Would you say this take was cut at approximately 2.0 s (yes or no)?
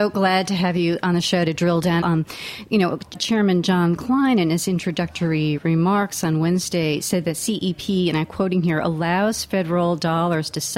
yes